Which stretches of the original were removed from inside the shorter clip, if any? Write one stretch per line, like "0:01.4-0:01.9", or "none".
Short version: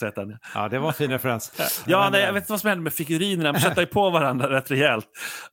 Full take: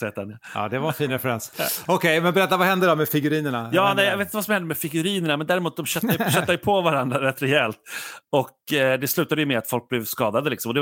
0:01.9-0:03.7
0:05.4-0:06.2